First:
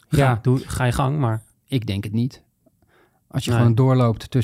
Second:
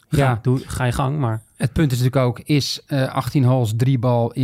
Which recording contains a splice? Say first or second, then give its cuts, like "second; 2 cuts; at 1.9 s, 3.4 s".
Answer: first; 1 cut; at 1.5 s